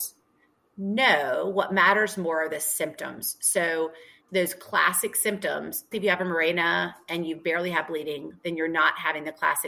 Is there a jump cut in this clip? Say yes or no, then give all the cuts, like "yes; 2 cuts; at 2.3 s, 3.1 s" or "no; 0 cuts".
yes; 2 cuts; at 4.2 s, 5.9 s